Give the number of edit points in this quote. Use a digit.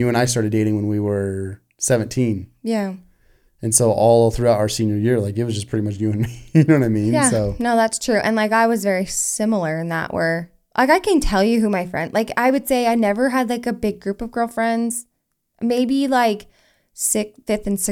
0